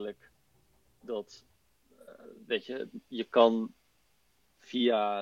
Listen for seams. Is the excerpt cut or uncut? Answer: uncut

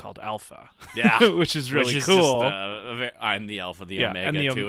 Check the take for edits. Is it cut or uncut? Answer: uncut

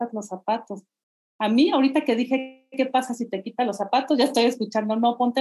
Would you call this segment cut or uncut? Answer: uncut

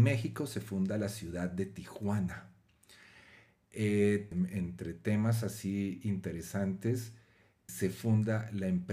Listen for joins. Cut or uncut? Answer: cut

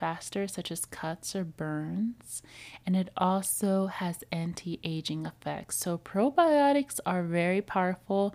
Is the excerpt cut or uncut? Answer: uncut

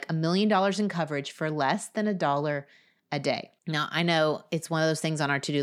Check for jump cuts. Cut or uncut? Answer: cut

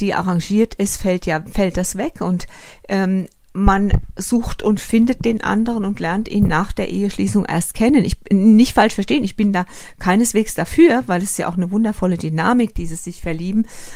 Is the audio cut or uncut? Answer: uncut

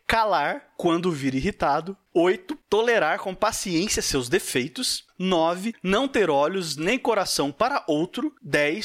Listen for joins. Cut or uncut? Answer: uncut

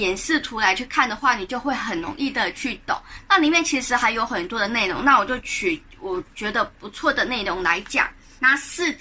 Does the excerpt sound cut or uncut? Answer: uncut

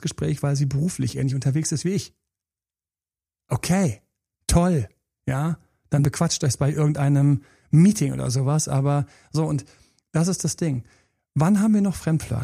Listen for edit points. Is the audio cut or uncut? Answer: uncut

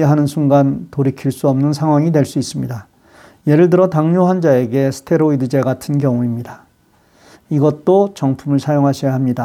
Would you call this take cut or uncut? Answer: cut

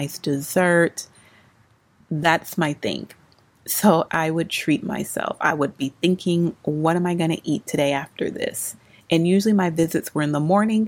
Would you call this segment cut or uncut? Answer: cut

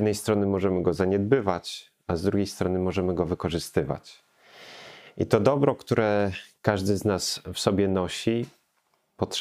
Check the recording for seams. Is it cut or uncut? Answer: cut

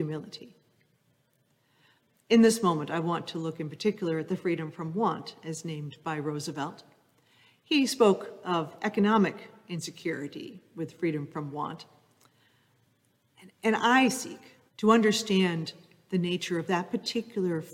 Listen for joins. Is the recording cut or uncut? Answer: cut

